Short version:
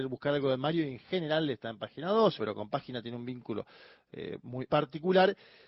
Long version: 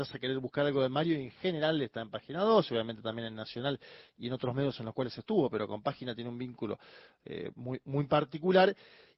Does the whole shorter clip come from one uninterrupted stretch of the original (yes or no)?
no